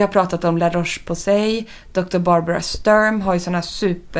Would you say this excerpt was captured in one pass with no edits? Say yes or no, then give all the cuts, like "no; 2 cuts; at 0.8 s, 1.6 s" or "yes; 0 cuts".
yes; 0 cuts